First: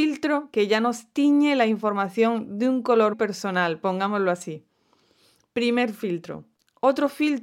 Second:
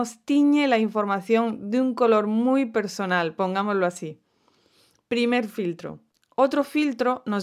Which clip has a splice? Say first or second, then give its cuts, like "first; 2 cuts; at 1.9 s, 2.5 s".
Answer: first; 1 cut; at 3.1 s